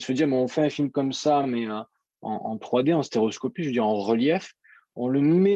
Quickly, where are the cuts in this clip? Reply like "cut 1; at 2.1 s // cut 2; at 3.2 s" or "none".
none